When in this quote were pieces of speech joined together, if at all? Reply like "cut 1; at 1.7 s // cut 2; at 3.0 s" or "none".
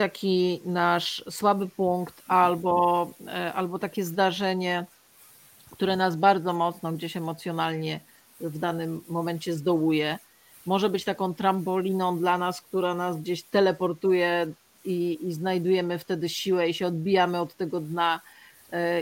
none